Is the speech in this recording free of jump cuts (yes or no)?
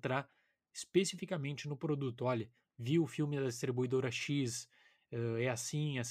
yes